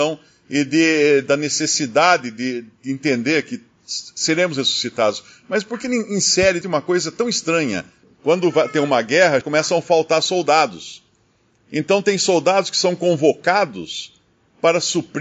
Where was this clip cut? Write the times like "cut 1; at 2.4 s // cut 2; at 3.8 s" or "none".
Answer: cut 1; at 6.6 s // cut 2; at 8.0 s // cut 3; at 9.4 s